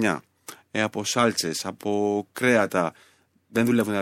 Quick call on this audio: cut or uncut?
uncut